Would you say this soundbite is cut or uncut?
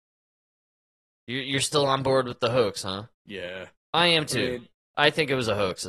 cut